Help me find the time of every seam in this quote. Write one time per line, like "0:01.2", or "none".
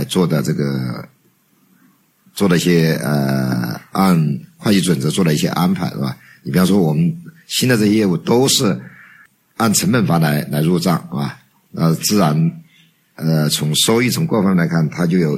none